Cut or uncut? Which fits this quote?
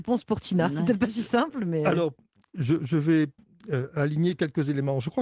uncut